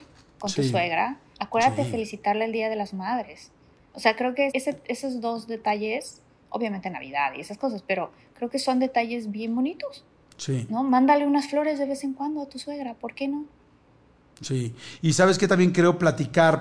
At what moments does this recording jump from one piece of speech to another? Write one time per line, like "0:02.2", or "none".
0:01.3
0:04.5